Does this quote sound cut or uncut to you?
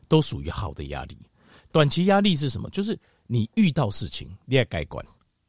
uncut